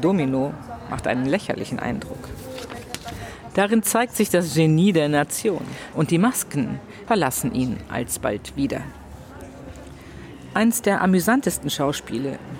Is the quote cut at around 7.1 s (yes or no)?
yes